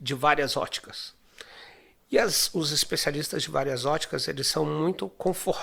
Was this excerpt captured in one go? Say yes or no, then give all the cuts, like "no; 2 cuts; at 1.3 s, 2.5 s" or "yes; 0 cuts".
yes; 0 cuts